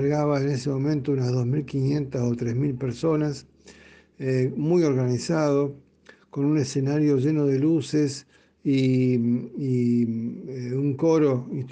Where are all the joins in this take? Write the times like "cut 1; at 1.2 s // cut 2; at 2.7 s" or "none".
none